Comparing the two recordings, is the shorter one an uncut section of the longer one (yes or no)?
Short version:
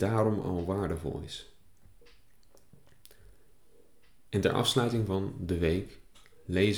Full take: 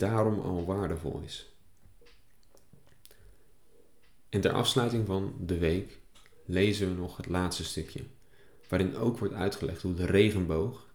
yes